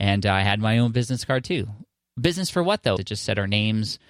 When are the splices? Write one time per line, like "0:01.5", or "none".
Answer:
0:03.0